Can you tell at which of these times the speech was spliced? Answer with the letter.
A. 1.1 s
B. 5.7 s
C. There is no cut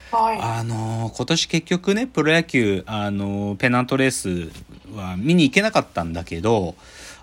C